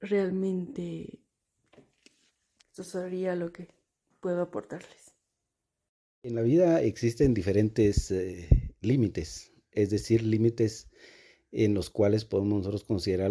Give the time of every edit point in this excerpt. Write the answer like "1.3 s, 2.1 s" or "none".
2.6 s